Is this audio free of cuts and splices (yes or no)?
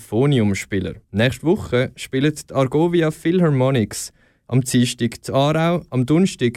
no